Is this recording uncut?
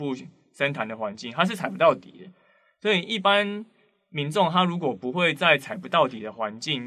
yes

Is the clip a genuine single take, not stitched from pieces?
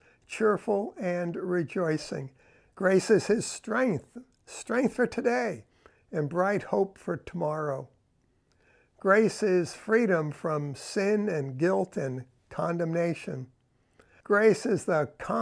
no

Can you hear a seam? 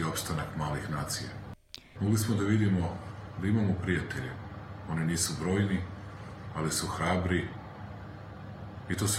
yes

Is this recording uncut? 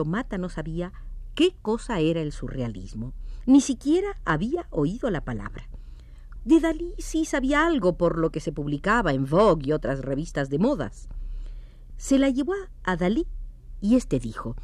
no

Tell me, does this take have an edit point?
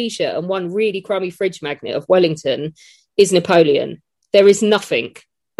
no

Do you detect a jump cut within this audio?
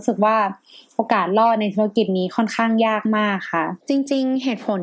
yes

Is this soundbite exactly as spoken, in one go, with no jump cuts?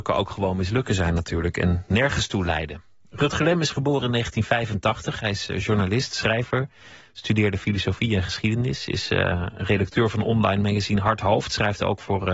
yes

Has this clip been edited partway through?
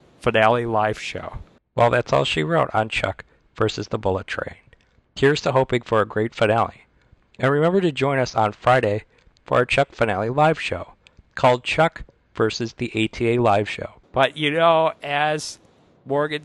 yes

